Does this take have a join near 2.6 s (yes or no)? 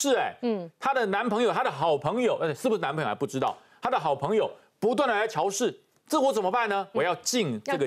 no